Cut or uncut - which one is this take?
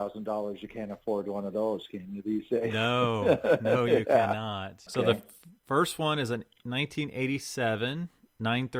cut